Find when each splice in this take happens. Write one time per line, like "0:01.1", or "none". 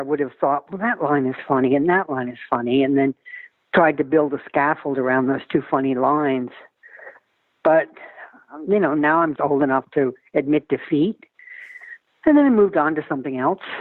0:09.4